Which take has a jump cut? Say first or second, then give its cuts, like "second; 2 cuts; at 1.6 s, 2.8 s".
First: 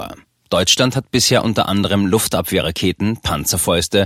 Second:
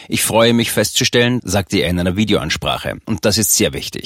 second; 2 cuts; at 1.4 s, 3.0 s